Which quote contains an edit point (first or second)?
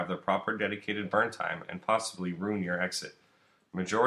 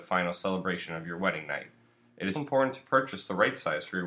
second